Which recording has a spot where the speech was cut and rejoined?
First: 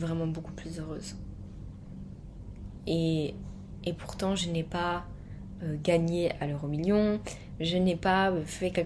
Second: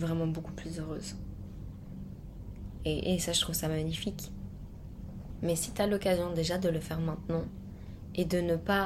second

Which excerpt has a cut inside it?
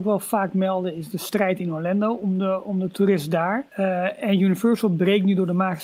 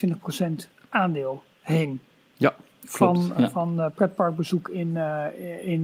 first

